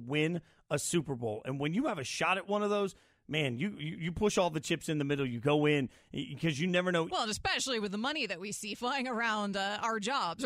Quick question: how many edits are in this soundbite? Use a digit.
1